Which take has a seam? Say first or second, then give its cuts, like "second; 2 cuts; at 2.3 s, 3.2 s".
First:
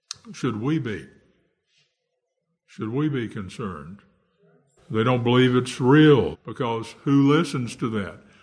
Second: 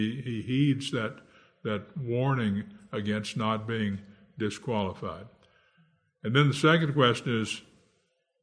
first; 2 cuts; at 4.8 s, 6.3 s